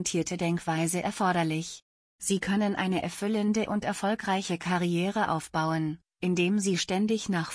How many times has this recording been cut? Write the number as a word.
zero